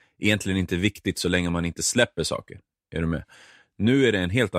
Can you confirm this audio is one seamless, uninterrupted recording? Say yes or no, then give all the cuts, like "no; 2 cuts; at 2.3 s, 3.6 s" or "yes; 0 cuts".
yes; 0 cuts